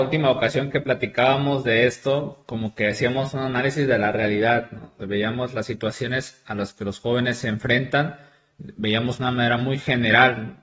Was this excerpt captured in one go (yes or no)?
yes